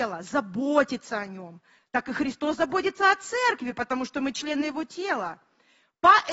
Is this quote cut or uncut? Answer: uncut